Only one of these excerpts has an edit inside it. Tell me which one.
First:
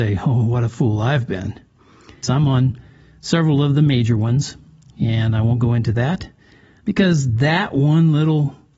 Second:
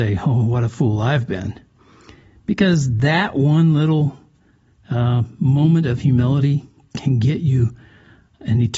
first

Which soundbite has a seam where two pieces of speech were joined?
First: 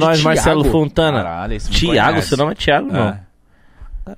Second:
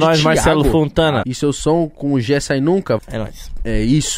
second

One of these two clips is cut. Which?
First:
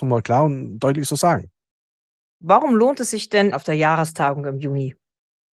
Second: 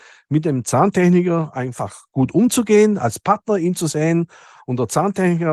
first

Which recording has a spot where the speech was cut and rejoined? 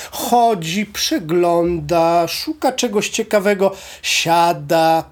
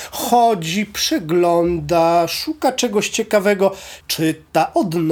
second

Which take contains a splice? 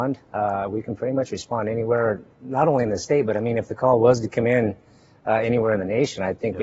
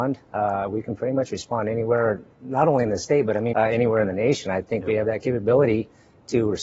second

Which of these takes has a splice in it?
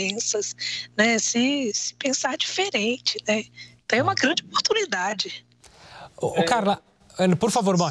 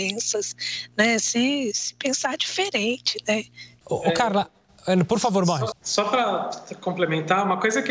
second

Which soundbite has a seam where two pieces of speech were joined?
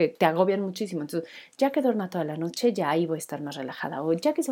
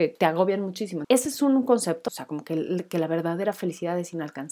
second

